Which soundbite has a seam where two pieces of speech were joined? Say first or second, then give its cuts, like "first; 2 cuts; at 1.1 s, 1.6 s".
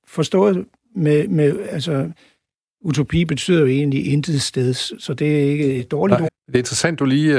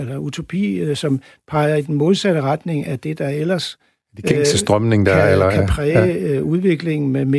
first; 1 cut; at 6.3 s